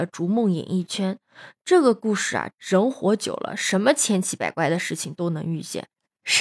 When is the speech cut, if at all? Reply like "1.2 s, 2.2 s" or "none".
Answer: 2.5 s

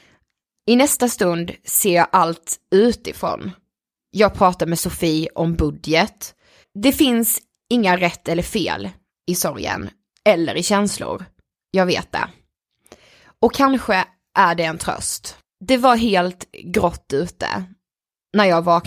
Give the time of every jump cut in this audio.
6.6 s

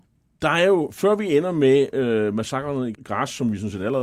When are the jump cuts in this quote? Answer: 3.0 s

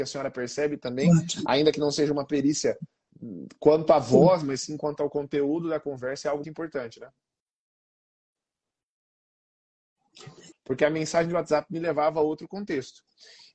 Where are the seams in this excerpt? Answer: 6.4 s, 10.5 s

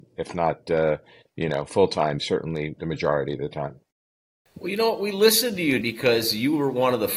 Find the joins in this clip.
5.8 s

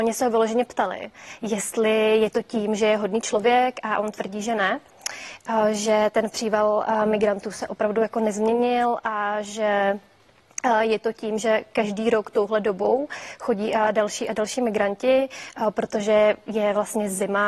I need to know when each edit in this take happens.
none

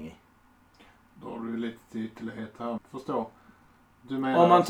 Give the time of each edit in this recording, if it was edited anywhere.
2.8 s

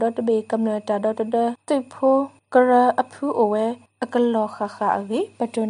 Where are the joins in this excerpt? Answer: none

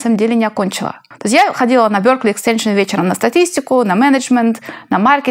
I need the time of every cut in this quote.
1.1 s

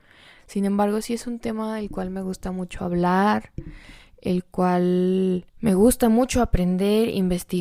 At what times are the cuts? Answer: 5.5 s

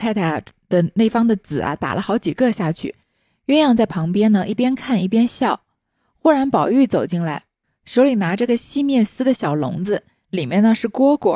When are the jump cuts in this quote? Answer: none

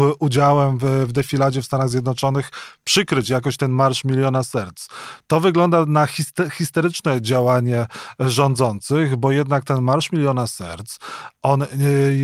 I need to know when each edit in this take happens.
none

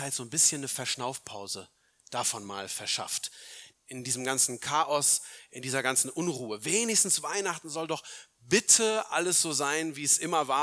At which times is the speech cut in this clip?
3.7 s

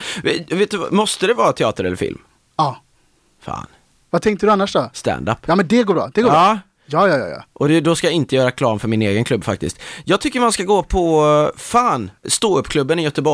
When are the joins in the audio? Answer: 12.2 s

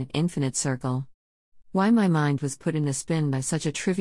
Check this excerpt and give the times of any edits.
1.6 s

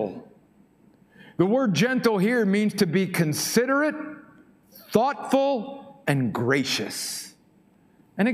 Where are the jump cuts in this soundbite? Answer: none

